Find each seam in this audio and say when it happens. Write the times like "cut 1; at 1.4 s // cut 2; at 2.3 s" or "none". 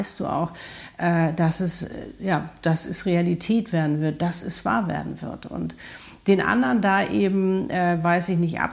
none